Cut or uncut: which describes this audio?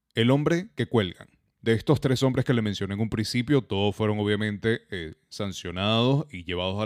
uncut